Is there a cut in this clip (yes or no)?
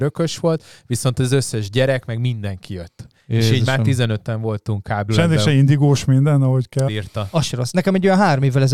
yes